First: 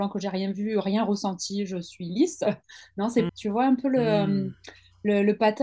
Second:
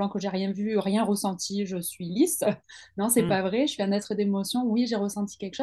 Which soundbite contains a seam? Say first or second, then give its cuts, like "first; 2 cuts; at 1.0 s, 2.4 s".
first; 1 cut; at 3.3 s